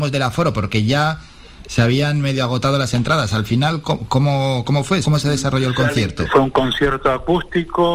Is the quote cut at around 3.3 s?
no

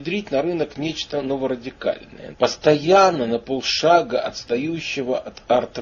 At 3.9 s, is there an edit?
no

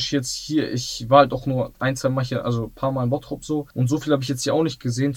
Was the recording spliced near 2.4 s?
no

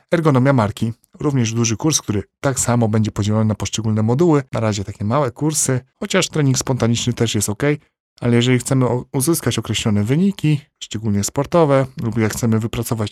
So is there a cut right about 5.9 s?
yes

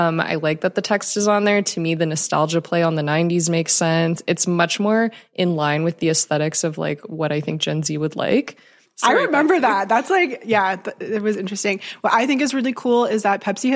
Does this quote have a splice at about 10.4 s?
no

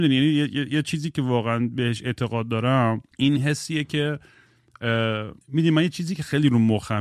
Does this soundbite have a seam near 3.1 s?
yes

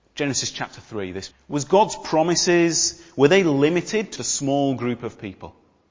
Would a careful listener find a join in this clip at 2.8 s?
no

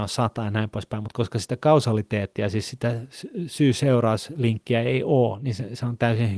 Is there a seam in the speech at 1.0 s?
no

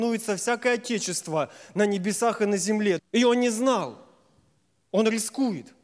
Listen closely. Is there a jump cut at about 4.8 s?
no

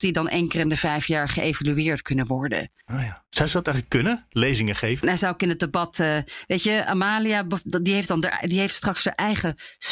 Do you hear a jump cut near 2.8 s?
yes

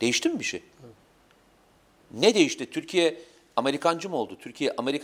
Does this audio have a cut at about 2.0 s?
no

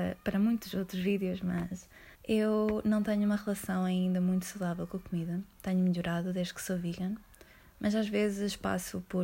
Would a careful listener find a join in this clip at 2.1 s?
yes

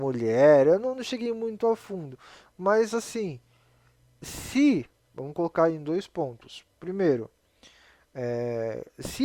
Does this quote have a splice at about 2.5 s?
no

